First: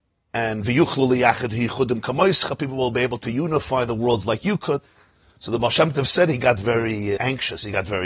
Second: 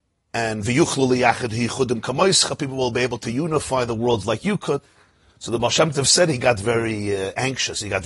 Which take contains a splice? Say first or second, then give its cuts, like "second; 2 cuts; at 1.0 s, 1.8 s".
first; 1 cut; at 7.2 s